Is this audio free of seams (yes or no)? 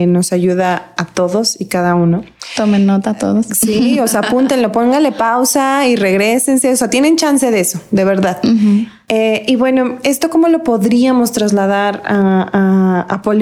yes